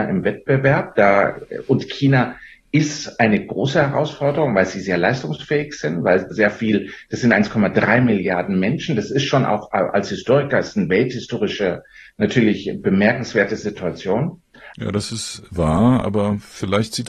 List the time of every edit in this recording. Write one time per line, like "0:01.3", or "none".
0:06.3
0:14.7
0:16.0